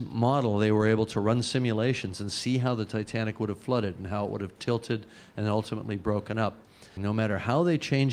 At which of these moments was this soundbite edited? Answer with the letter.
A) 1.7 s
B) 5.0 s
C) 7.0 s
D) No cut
C